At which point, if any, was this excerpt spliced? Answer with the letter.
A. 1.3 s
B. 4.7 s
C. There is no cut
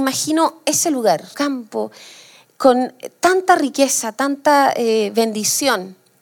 A